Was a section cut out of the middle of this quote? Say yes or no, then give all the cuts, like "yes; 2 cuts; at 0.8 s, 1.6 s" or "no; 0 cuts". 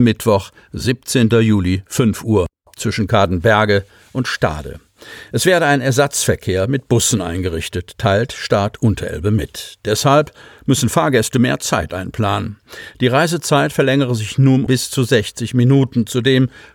yes; 1 cut; at 14.7 s